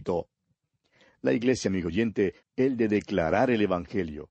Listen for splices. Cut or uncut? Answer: cut